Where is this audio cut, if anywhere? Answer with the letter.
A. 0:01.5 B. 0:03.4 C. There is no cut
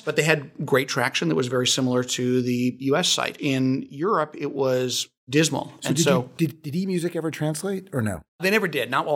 B